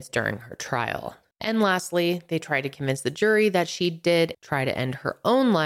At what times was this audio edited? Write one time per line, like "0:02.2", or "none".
0:01.3
0:04.3